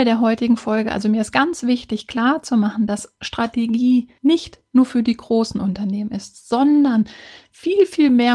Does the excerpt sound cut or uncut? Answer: uncut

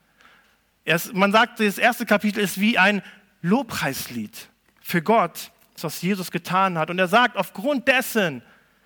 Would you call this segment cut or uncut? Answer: cut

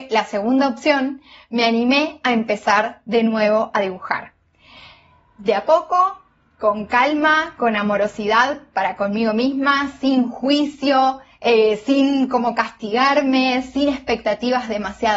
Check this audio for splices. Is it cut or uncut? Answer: uncut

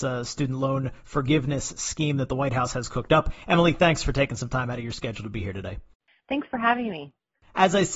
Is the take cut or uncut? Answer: uncut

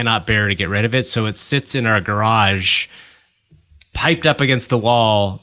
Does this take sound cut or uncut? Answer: uncut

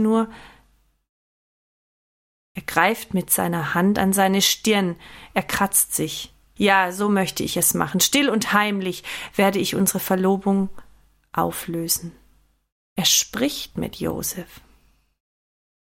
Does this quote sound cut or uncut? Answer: cut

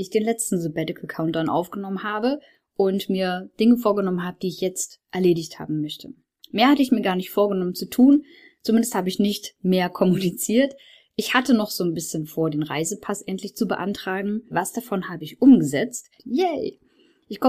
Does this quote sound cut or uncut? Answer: cut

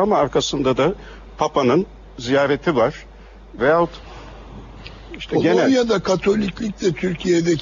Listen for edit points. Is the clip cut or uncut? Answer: cut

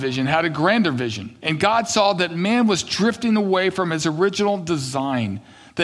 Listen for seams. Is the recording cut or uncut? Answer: cut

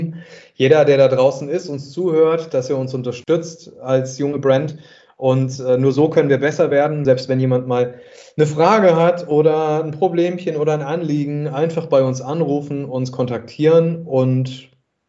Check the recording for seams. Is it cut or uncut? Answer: cut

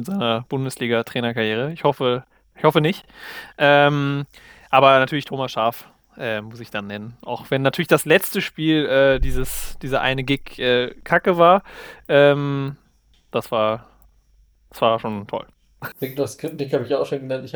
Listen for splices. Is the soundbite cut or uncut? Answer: cut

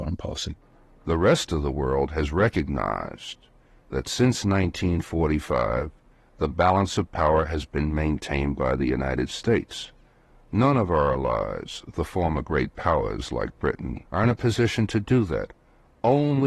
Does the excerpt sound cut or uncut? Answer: cut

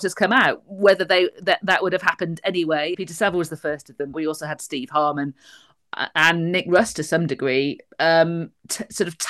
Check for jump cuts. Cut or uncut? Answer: cut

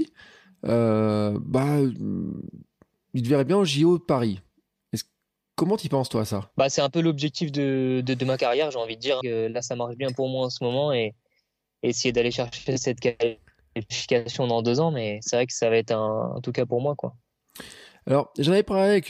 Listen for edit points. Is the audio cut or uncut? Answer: cut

